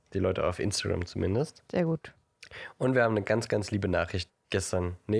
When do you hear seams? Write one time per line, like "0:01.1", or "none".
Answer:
0:01.7
0:04.3